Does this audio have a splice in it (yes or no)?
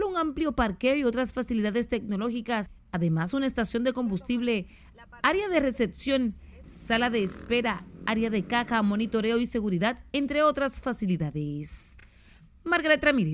no